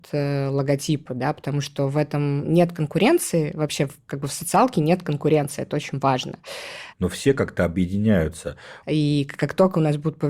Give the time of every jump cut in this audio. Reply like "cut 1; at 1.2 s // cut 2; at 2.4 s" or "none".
cut 1; at 6.9 s // cut 2; at 8.8 s